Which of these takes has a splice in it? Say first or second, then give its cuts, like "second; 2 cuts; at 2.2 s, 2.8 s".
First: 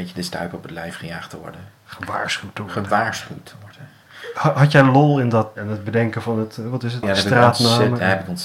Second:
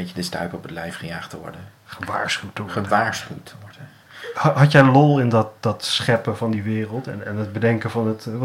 first; 2 cuts; at 5.6 s, 7.0 s